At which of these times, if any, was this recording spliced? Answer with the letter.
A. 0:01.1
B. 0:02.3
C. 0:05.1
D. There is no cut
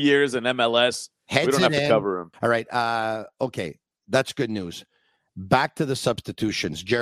B